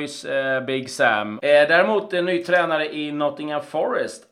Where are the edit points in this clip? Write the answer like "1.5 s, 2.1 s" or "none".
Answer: 1.4 s